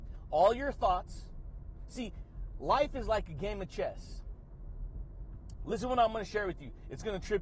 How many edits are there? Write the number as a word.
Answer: zero